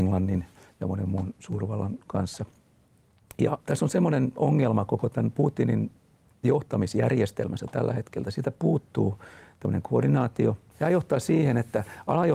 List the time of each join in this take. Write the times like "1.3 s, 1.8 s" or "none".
3.6 s, 10.7 s